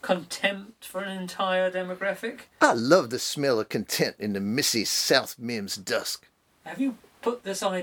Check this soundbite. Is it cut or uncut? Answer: uncut